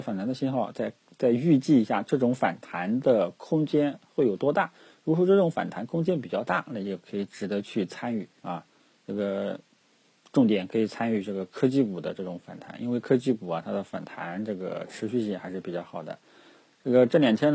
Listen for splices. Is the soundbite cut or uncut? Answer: cut